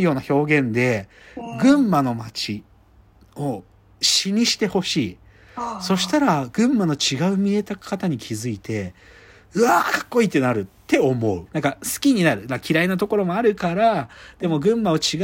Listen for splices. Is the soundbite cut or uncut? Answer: cut